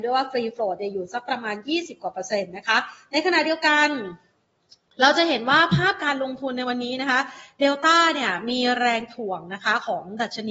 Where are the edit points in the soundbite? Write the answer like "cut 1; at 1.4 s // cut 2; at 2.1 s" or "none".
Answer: none